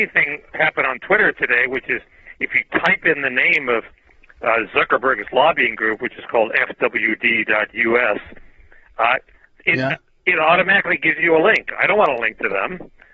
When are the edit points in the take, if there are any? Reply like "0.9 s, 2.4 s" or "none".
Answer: none